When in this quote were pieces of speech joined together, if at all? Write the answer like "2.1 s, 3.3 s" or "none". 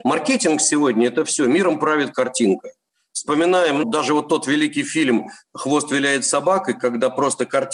3.8 s